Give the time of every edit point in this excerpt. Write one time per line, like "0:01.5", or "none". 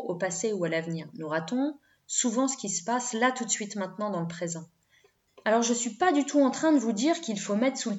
0:05.3